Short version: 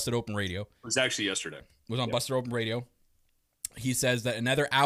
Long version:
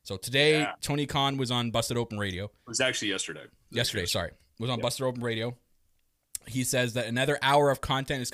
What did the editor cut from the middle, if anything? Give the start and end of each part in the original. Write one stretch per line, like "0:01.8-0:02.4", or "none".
0:03.4-0:04.3

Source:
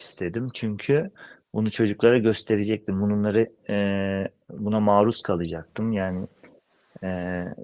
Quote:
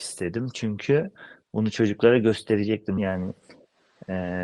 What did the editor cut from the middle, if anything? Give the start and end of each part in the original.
0:03.0-0:05.9

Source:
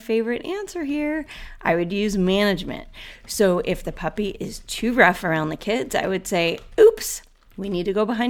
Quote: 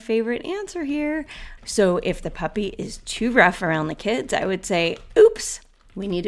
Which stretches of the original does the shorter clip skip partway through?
0:01.6-0:03.2

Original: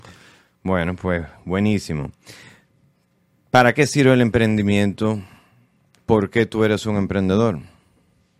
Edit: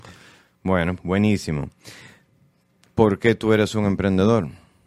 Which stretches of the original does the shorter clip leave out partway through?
0:01.0-0:01.4
0:03.2-0:05.9

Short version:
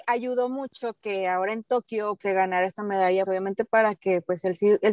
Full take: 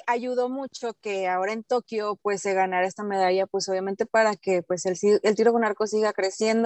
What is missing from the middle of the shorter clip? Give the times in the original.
0:02.2-0:02.4
0:03.5-0:03.7

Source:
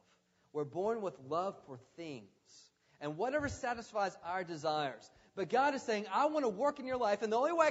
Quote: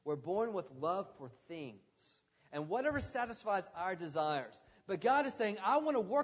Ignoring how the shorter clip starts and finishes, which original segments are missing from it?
none

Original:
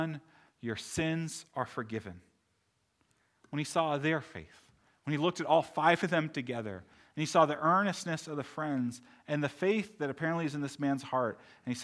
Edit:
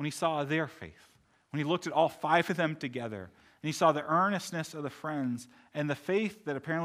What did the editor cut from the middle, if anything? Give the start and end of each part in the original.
none

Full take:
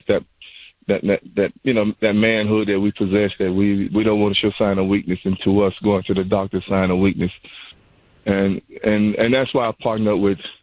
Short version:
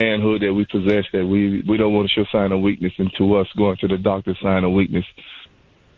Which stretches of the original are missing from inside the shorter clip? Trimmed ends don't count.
none

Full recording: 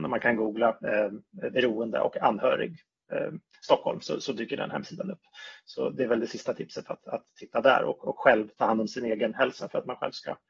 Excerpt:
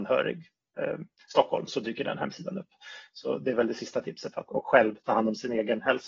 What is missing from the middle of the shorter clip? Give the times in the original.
0:04.0-0:04.2
0:07.0-0:08.0

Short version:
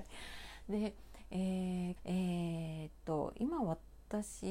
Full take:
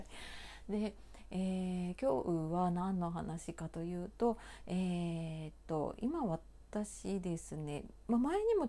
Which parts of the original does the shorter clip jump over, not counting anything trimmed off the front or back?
0:02.0-0:04.6

